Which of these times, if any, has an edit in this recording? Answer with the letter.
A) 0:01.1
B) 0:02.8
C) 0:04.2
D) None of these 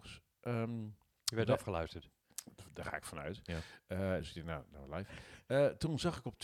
D